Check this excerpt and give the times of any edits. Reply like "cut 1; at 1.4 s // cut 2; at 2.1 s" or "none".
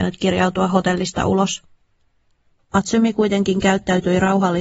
cut 1; at 2.5 s

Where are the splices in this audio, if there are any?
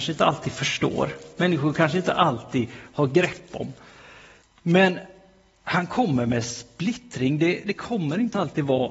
cut 1; at 4.4 s

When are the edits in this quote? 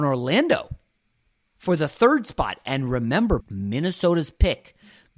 cut 1; at 3.4 s

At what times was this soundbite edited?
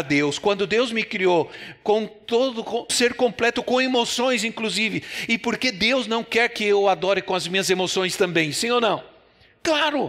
cut 1; at 2.9 s

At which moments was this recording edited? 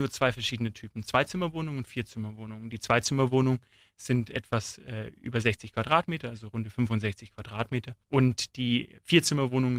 none

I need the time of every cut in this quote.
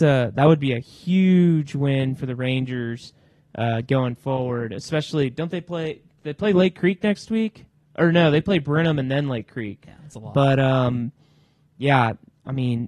cut 1; at 9.8 s

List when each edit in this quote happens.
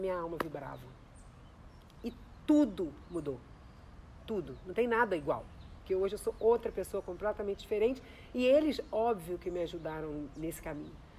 cut 1; at 5.8 s

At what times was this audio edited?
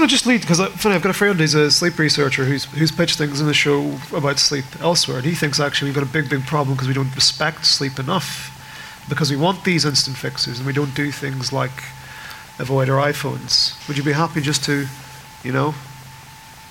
cut 1; at 13.8 s

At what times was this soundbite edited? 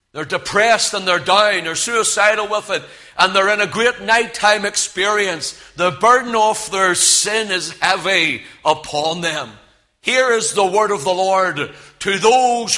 none

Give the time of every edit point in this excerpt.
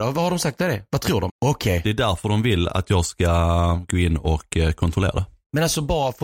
cut 1; at 1.3 s

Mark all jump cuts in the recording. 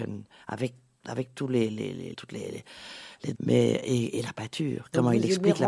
cut 1; at 2.1 s // cut 2; at 3.3 s

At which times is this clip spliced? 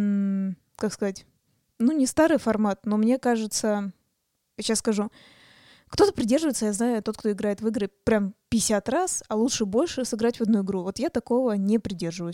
none

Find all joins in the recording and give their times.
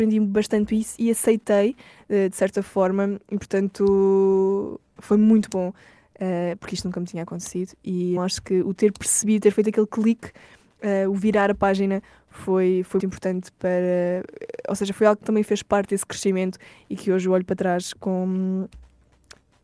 cut 1; at 8.2 s // cut 2; at 13.0 s

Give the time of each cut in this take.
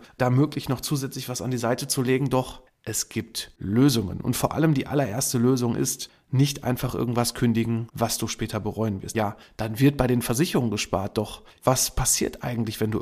cut 1; at 9.1 s

